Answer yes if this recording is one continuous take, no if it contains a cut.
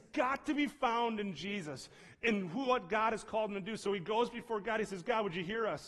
yes